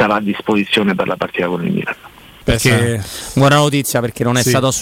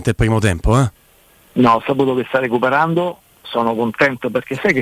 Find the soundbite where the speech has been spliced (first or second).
first